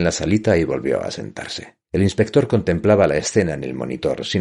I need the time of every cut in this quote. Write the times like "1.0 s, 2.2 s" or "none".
1.8 s